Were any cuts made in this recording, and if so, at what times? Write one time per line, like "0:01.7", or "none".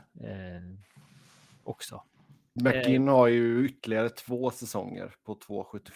0:02.6